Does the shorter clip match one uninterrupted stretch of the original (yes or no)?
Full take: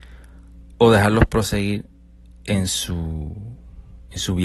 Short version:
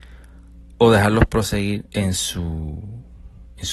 no